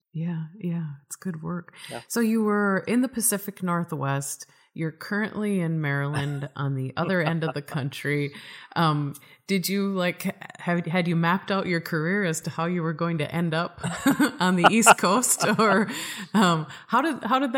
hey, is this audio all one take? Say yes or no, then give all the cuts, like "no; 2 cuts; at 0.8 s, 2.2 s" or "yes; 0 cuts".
yes; 0 cuts